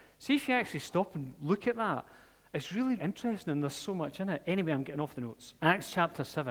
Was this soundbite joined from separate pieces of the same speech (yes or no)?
yes